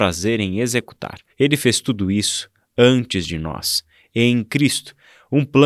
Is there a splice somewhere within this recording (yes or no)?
yes